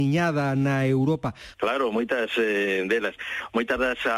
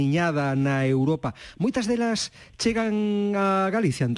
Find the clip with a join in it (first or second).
first